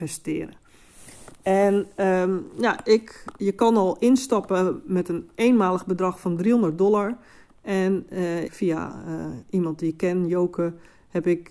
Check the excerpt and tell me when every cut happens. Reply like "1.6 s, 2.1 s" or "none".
8.5 s